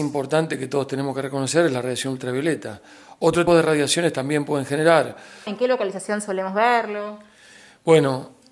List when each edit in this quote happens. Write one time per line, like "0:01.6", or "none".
0:03.5
0:05.5